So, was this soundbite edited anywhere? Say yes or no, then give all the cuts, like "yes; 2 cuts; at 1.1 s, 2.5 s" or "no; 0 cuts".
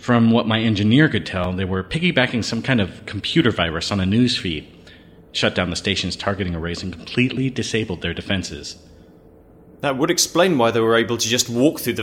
no; 0 cuts